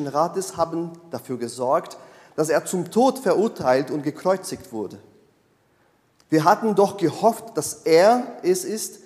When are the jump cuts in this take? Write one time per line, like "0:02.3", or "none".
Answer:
none